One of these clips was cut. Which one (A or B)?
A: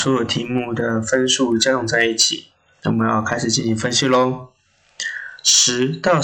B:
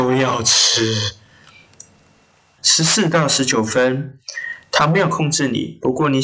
B